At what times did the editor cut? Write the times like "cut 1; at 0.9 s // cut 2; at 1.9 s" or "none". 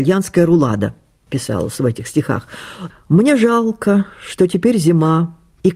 cut 1; at 2.9 s